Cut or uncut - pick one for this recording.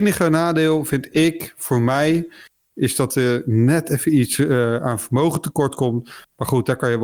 uncut